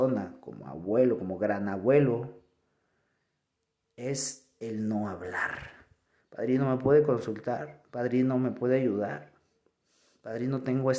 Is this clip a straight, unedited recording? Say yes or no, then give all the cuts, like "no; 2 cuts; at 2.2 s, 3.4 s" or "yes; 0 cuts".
no; 1 cut; at 6.2 s